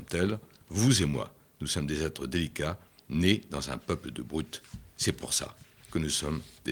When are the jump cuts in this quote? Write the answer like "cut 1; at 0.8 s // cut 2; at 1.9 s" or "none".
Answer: none

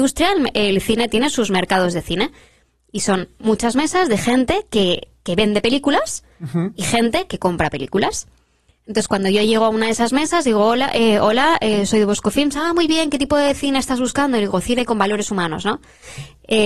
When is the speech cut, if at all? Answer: none

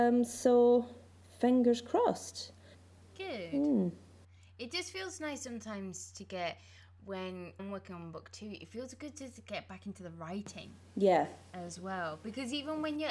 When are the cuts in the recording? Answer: cut 1; at 7.6 s

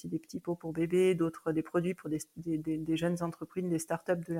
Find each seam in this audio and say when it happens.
none

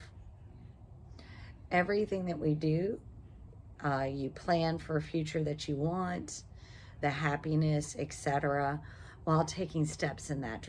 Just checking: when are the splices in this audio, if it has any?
cut 1; at 3.8 s // cut 2; at 7.0 s

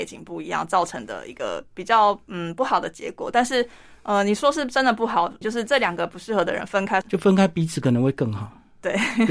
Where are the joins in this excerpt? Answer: cut 1; at 5.4 s // cut 2; at 7.0 s

